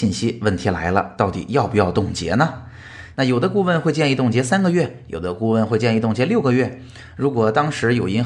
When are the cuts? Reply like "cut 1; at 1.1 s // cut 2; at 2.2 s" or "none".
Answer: cut 1; at 3.1 s